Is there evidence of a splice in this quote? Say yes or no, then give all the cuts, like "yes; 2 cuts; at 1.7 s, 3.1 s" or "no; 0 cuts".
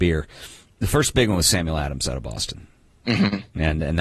no; 0 cuts